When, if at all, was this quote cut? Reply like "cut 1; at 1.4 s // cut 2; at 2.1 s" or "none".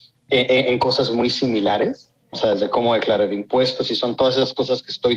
cut 1; at 2.3 s